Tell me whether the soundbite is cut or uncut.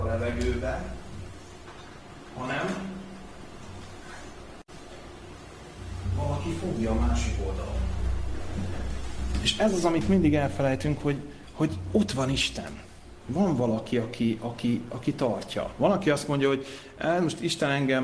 uncut